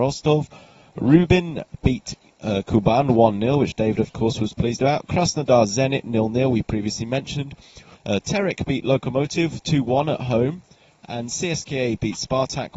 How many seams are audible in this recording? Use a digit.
1